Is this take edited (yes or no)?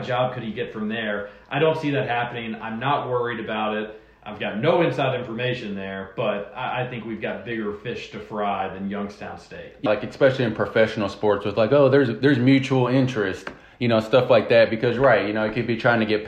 yes